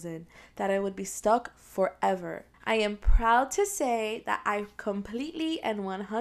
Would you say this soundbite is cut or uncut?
cut